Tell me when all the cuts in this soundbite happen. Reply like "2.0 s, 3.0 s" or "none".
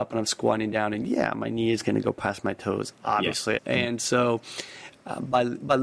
3.6 s